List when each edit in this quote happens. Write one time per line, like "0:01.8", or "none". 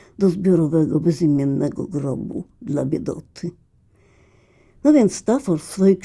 none